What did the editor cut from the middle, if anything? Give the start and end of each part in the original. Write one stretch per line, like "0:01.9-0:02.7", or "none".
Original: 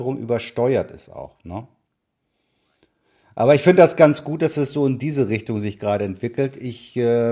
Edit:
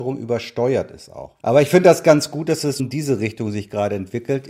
0:01.4-0:03.3
0:04.7-0:04.9